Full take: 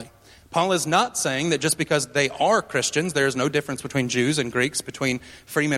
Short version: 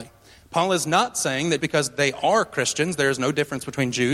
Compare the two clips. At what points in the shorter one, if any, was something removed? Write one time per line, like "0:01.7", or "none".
0:01.6